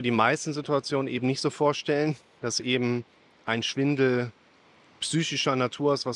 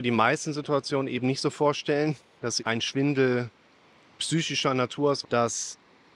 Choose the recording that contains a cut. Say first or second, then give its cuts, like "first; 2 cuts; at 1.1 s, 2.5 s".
second; 2 cuts; at 2.6 s, 5.2 s